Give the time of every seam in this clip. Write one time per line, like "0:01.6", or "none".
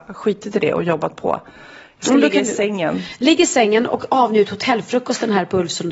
none